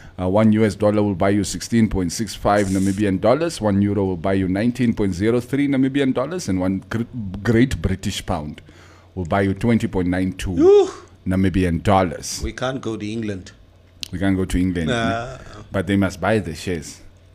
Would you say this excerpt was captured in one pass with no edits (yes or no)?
yes